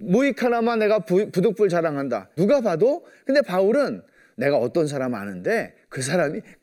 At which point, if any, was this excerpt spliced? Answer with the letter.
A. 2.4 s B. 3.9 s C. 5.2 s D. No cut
A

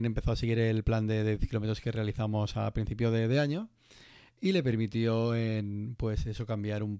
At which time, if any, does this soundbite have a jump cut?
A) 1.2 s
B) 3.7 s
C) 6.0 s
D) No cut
D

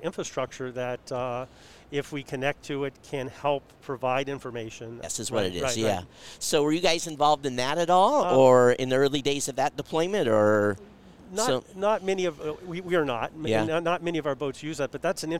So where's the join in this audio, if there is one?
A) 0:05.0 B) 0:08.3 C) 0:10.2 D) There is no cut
A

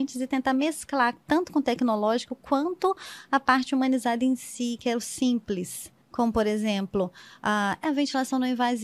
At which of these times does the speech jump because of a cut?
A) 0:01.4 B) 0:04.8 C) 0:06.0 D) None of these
C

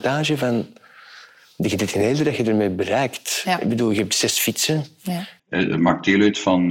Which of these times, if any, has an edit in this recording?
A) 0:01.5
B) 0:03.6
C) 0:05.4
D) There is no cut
C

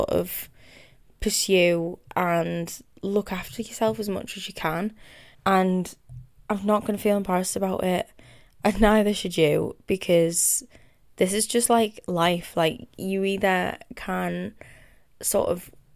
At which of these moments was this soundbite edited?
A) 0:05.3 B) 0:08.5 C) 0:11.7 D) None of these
A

